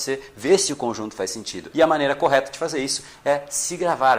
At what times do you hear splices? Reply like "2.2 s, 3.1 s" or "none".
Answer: 1.7 s